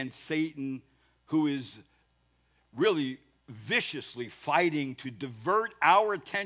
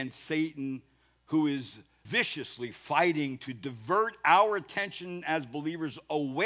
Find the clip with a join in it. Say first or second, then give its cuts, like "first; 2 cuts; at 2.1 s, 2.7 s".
second; 1 cut; at 2.1 s